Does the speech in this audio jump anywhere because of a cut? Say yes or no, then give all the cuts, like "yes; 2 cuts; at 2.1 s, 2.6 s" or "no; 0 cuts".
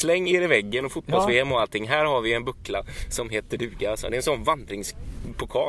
no; 0 cuts